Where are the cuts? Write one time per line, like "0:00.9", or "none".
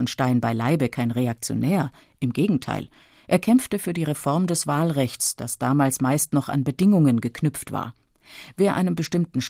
none